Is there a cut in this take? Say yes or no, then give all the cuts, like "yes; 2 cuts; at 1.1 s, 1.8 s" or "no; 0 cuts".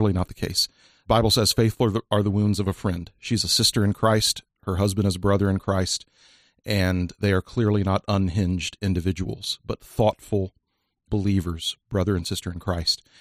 no; 0 cuts